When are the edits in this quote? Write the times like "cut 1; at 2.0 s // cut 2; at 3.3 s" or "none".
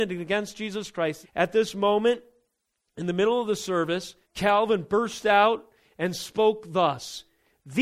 cut 1; at 1.2 s // cut 2; at 4.2 s